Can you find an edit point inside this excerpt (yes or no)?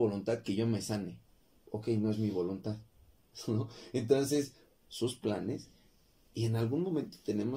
yes